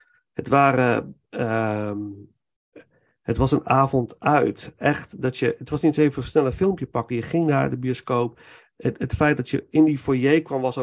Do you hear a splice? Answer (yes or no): no